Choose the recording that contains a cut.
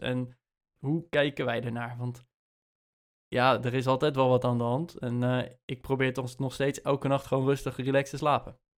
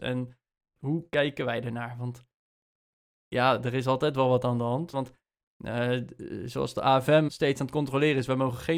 second; 2 cuts; at 4.9 s, 7.3 s

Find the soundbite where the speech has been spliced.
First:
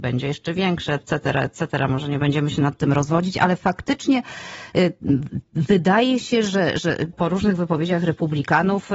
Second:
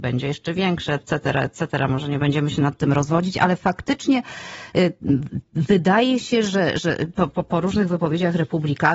first; 1 cut; at 7.1 s

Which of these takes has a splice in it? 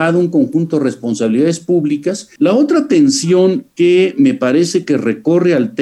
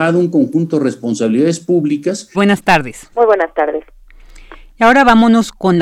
second; 1 cut; at 2.3 s

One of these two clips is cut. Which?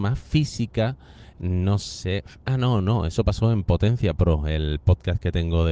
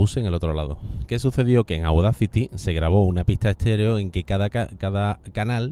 first; 1 cut; at 1.3 s

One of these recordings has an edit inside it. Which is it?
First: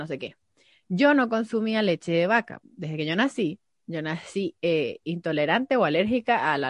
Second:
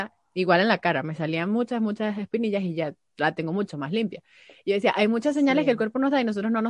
first; 1 cut; at 2.6 s

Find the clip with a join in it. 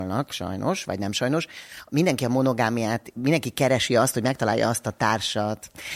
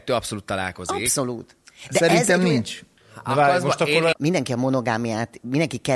second; 2 cuts; at 3.0 s, 4.1 s

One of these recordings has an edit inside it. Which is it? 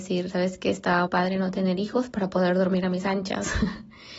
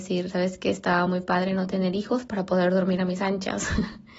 first; 1 cut; at 1.1 s

